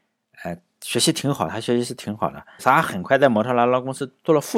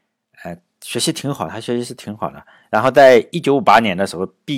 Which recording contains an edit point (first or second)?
first